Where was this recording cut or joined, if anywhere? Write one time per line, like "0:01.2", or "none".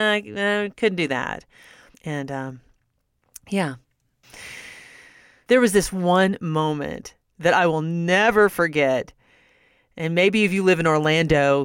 0:01.9